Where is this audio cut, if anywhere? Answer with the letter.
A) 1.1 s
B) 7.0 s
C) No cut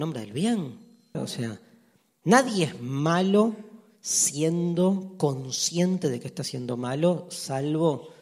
A